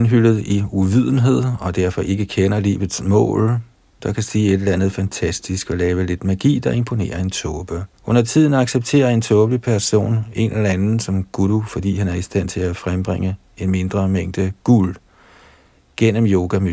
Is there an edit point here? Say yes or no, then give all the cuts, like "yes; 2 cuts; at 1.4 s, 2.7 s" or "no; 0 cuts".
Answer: yes; 2 cuts; at 4.0 s, 7.9 s